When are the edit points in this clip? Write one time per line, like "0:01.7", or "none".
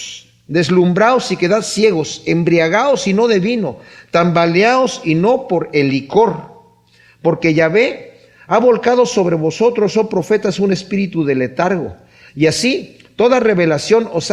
0:12.3